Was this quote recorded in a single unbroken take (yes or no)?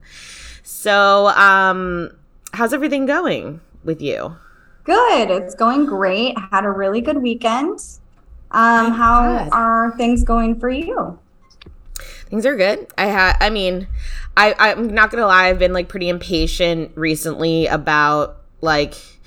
yes